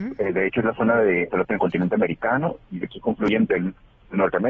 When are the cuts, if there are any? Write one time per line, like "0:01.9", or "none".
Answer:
0:01.3